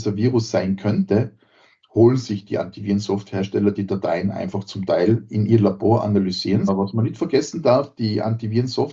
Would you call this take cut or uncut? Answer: cut